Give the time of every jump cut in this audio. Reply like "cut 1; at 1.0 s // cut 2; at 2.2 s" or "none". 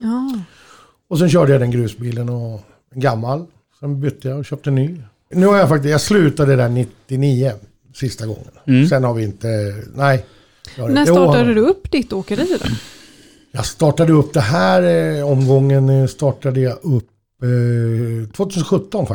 cut 1; at 5.3 s